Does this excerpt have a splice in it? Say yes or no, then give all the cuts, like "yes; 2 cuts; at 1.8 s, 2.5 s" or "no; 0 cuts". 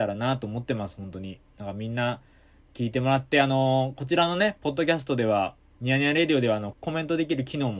yes; 1 cut; at 6.7 s